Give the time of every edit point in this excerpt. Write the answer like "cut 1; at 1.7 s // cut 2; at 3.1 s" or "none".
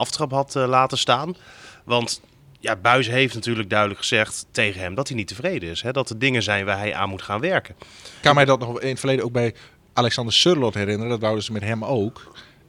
cut 1; at 8.2 s